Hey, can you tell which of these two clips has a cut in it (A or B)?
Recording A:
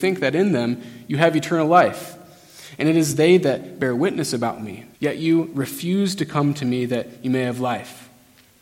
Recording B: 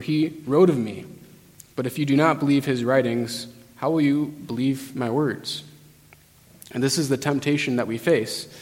A